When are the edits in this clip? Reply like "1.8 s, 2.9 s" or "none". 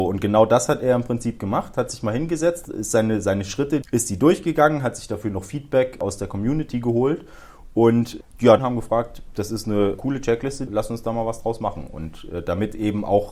3.8 s, 8.6 s, 10.7 s